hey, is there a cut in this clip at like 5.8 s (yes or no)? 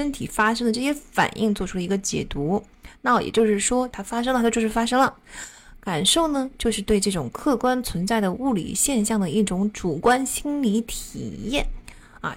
no